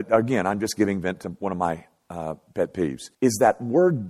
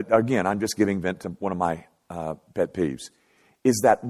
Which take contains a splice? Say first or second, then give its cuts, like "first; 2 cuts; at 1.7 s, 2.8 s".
first; 1 cut; at 3.1 s